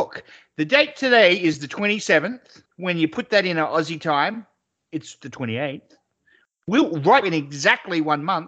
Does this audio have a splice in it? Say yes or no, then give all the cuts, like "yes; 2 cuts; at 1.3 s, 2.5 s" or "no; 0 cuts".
yes; 2 cuts; at 2.7 s, 7.2 s